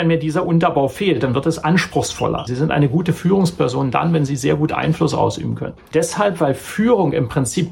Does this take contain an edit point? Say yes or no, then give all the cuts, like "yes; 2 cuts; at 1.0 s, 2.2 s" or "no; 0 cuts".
yes; 2 cuts; at 2.5 s, 5.9 s